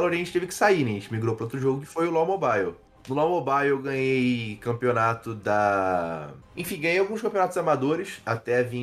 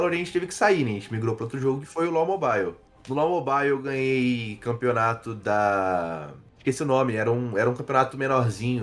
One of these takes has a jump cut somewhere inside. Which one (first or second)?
first